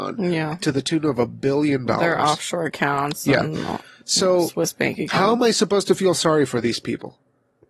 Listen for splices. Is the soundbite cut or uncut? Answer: uncut